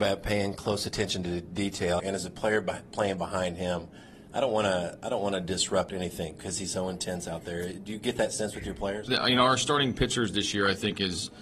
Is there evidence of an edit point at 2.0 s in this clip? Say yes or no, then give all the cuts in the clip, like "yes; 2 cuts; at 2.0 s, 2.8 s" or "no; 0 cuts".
yes; 1 cut; at 2.0 s